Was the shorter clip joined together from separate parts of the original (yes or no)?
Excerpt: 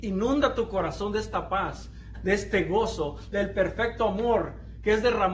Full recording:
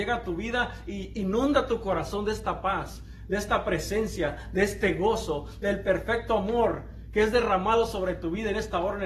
yes